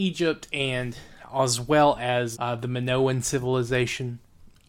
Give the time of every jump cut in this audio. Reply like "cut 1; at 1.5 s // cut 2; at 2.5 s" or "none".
cut 1; at 2.3 s